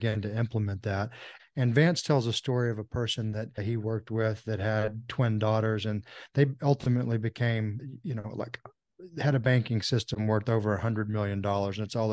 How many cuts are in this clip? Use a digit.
1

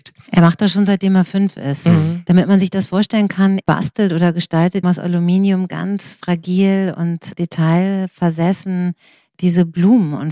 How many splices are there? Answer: 2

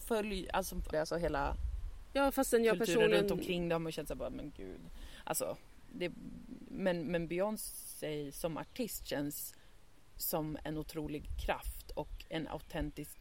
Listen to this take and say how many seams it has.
1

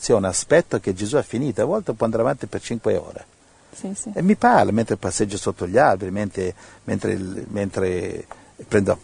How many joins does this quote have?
0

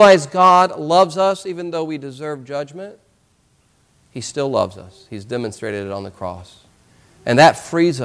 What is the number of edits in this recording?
0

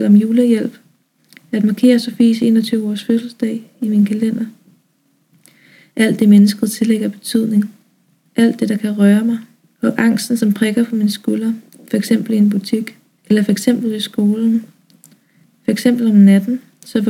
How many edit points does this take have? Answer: 1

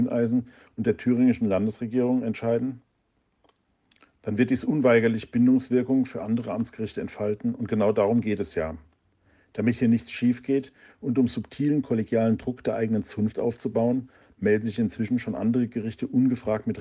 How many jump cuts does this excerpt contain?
1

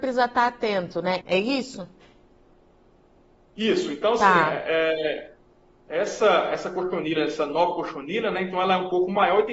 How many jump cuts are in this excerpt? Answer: 1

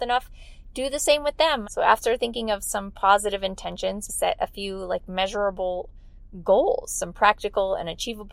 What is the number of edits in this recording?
2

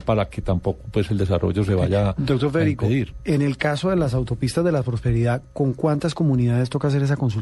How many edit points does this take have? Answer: 0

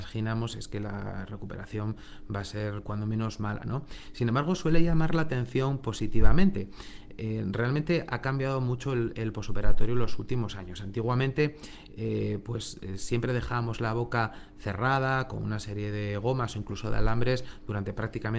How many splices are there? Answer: 1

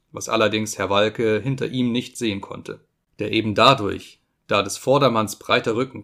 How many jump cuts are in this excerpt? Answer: 0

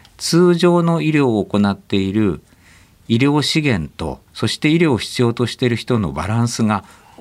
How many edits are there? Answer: 1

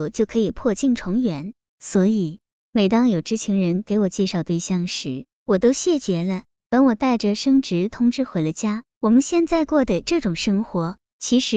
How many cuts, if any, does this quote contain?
2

